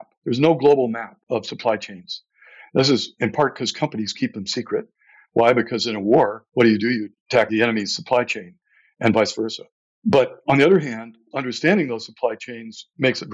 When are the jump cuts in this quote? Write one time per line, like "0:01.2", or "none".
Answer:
0:05.3
0:11.3